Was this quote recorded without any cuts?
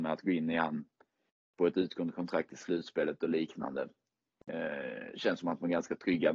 yes; 0 cuts

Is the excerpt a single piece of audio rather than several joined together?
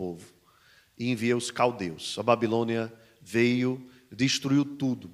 yes; 0 cuts

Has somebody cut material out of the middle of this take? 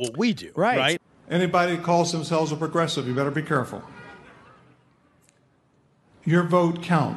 yes; 1 cut; at 1.2 s

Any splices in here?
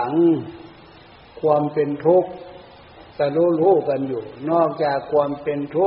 yes; 1 cut; at 3.1 s

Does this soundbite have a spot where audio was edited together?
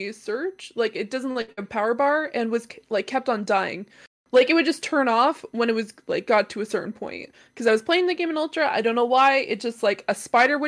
no; 0 cuts

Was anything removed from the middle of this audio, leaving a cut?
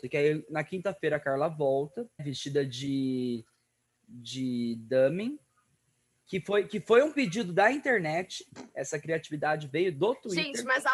yes; 1 cut; at 2.2 s

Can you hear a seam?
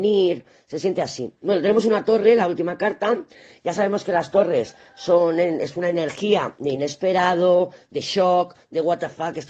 no; 0 cuts

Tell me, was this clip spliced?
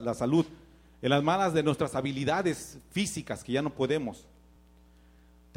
no; 0 cuts

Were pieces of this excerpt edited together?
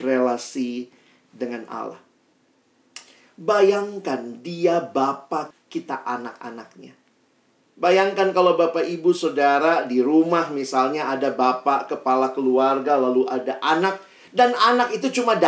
yes; 1 cut; at 5.5 s

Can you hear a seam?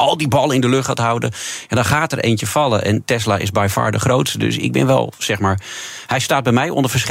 no; 0 cuts

